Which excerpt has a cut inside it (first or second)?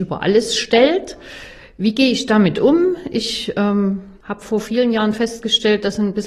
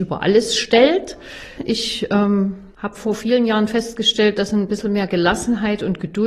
second